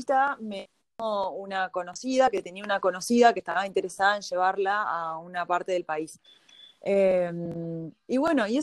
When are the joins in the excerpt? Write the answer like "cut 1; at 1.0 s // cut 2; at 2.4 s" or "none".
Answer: none

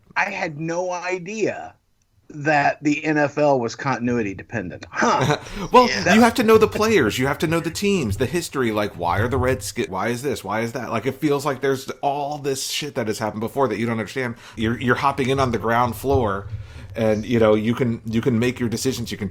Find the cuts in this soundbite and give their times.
cut 1; at 9.9 s // cut 2; at 14.6 s

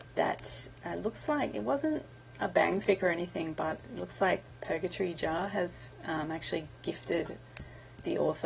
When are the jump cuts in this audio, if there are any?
none

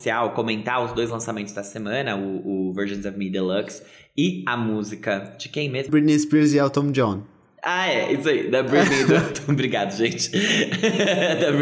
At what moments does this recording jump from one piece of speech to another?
cut 1; at 5.9 s

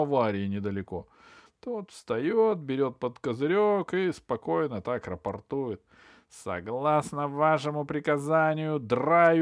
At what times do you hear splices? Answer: cut 1; at 1.5 s

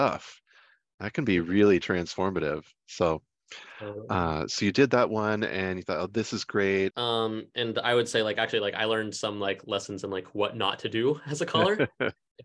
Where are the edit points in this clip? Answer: cut 1; at 6.9 s

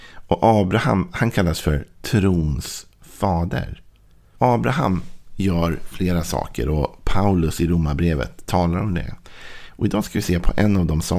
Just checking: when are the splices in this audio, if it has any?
cut 1; at 4.4 s

